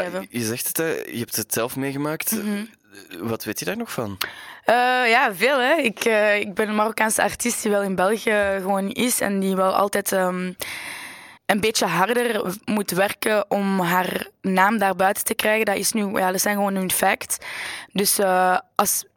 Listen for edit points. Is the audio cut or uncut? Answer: cut